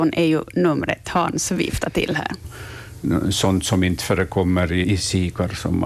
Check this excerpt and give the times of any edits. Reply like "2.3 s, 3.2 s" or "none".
2.4 s, 4.8 s